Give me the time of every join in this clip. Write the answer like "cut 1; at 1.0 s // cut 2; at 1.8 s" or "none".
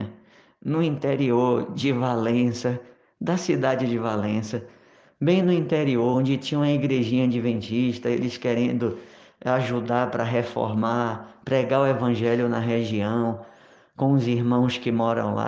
none